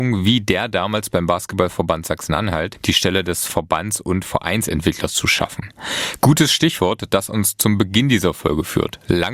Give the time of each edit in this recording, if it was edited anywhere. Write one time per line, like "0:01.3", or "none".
0:06.2